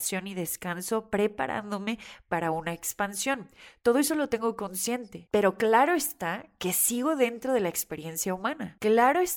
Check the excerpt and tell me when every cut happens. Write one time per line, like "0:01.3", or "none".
none